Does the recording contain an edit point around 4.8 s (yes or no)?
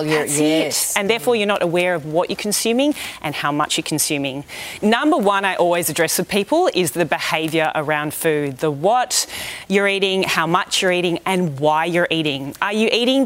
yes